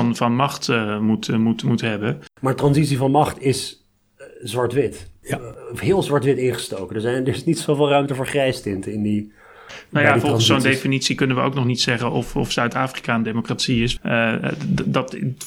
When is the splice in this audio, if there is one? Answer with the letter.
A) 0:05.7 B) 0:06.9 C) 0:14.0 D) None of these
C